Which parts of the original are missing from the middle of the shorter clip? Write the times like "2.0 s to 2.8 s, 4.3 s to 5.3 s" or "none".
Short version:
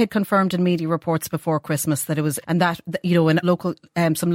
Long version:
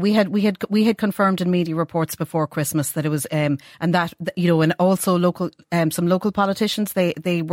3.3 s to 3.7 s, 4.8 s to 5.2 s

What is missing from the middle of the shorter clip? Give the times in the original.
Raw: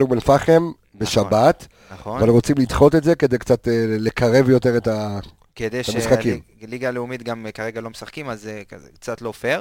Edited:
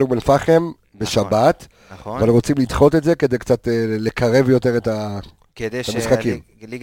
none

